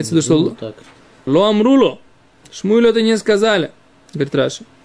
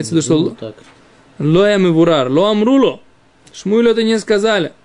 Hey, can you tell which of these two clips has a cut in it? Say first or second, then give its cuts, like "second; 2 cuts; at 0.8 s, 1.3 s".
first; 1 cut; at 1.3 s